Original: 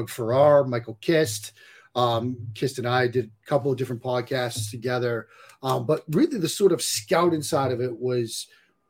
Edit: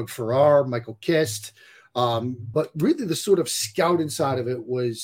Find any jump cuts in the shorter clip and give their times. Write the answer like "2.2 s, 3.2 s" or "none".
2.5 s

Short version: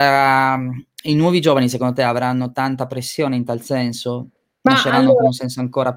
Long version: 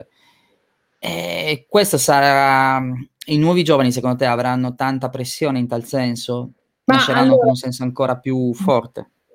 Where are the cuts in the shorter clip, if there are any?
none

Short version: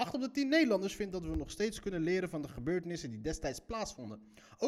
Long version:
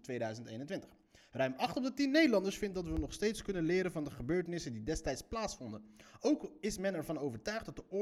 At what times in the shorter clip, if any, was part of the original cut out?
none

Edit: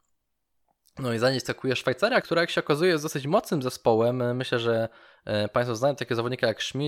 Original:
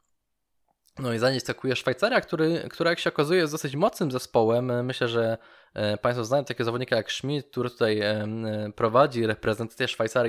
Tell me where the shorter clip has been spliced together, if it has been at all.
2.2 s

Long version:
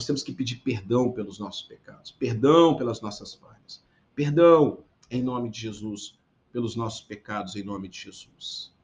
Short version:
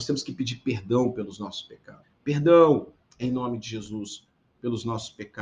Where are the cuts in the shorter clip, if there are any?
2.0 s

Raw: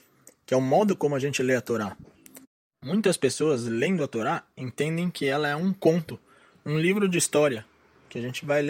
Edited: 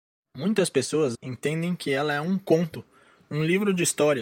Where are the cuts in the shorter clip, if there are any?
1.1 s

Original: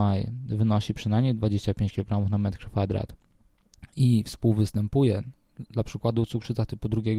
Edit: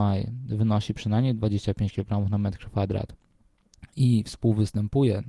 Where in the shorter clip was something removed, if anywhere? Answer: none

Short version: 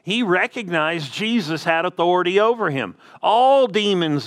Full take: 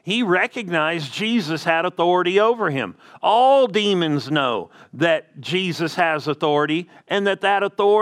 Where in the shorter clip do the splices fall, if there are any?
none

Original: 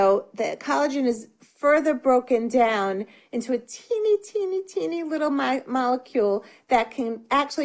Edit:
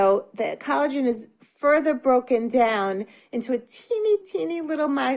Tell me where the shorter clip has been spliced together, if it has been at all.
4.2 s

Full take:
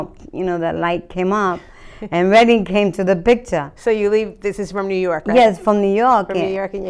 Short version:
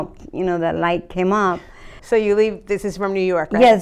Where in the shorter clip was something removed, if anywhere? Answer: 2.0 s

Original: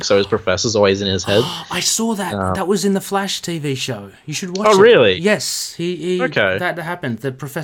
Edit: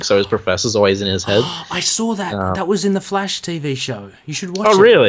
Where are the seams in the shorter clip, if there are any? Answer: none

